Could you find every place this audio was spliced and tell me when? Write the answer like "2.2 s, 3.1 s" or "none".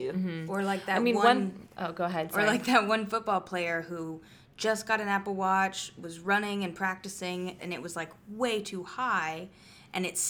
7.6 s